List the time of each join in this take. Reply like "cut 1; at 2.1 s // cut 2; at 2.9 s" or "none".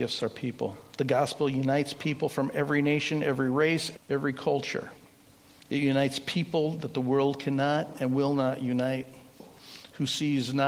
cut 1; at 3.9 s